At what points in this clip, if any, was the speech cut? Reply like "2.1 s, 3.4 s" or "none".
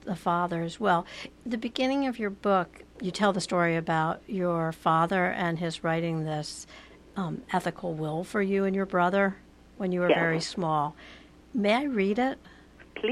none